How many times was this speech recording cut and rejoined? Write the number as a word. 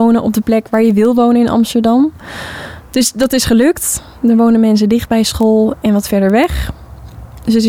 zero